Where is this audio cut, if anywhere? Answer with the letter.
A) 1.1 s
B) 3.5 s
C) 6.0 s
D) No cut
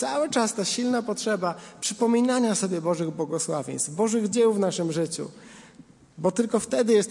D